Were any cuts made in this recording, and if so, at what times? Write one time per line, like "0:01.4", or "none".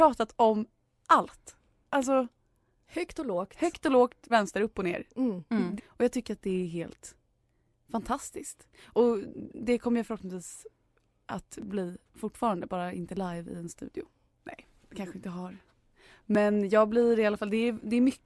0:04.3
0:05.8
0:14.3